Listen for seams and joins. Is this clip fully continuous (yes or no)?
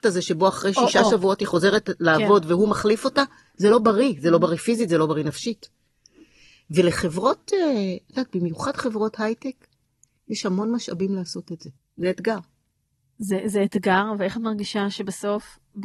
no